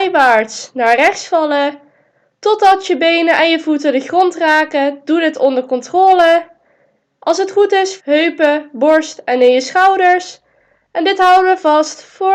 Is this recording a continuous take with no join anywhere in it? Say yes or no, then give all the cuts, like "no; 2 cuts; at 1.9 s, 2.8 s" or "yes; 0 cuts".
no; 1 cut; at 8.0 s